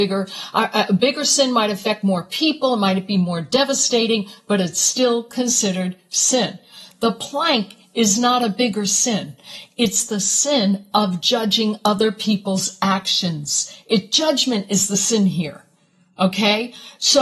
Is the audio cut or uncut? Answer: uncut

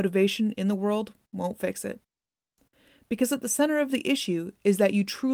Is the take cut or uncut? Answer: uncut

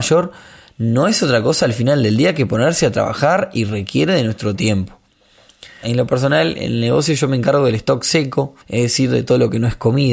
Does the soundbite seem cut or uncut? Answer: cut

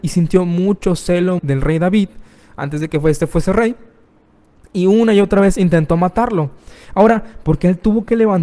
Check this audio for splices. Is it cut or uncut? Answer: cut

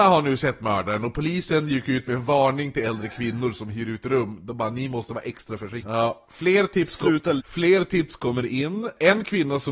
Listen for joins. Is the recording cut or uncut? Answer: cut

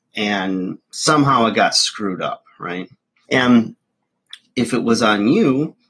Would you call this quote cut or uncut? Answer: cut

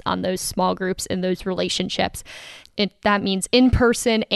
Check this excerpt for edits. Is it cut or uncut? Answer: cut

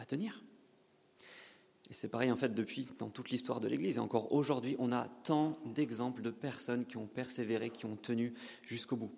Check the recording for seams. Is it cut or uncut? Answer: uncut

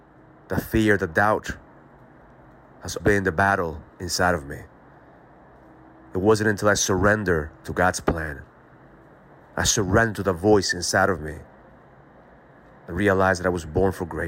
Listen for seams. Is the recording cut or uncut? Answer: cut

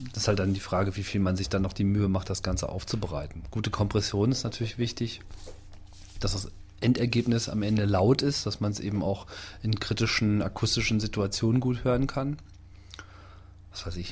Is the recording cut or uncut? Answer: uncut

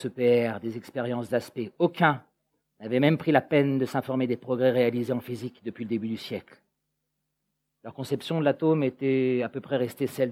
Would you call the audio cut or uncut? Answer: uncut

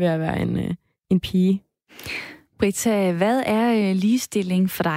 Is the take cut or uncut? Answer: uncut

